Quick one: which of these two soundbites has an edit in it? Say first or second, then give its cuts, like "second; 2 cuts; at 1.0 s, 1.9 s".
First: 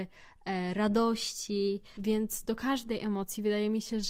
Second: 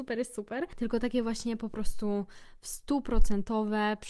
first; 1 cut; at 2.0 s